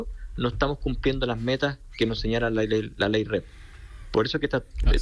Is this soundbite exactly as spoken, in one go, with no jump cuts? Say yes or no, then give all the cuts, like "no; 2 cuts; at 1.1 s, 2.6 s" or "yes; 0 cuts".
yes; 0 cuts